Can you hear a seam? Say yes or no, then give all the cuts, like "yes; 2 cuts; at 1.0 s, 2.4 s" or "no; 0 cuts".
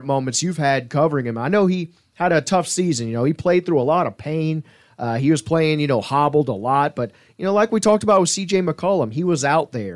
no; 0 cuts